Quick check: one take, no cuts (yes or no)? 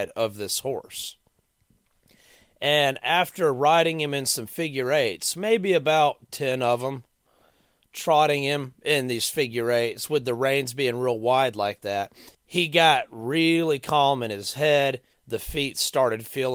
no